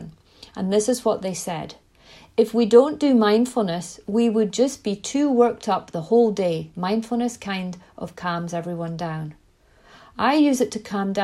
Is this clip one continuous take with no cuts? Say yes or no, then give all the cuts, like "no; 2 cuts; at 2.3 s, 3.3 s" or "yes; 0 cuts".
yes; 0 cuts